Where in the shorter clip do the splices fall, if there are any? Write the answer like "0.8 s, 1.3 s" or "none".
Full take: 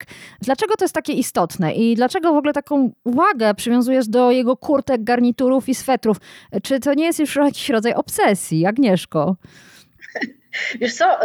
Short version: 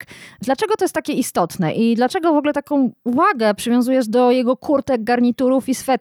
none